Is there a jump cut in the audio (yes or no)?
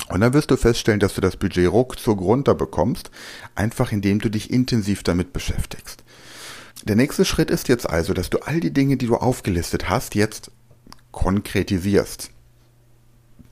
yes